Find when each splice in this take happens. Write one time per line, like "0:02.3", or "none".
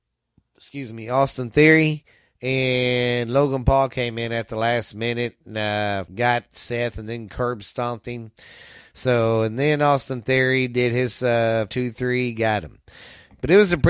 0:06.1
0:11.7